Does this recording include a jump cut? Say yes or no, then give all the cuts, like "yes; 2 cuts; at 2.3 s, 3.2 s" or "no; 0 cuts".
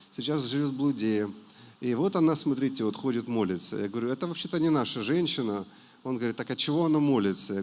no; 0 cuts